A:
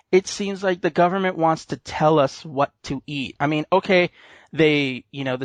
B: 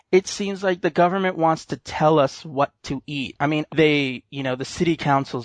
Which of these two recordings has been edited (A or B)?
B